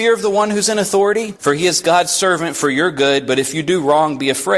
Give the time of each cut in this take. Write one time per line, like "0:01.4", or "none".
0:01.4